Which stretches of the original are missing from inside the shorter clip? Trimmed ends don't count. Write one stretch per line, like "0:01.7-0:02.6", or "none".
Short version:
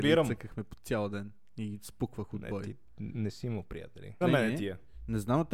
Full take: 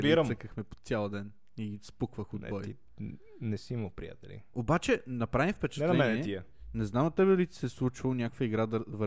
0:03.1-0:03.4
0:04.5-0:05.9